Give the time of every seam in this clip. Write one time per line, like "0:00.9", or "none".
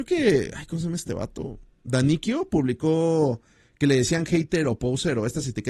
none